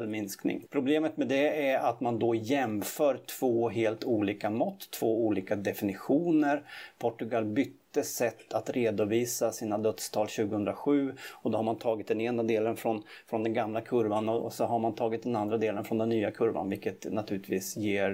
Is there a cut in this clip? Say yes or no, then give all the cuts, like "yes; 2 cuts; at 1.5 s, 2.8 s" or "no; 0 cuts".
yes; 1 cut; at 14.4 s